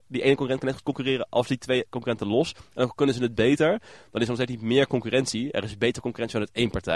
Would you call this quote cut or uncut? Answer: uncut